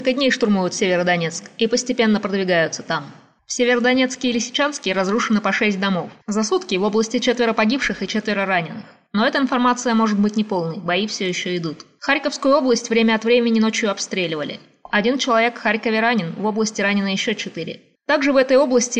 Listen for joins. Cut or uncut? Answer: uncut